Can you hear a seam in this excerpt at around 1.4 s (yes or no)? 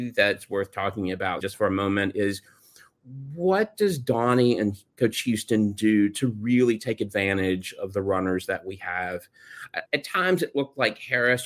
yes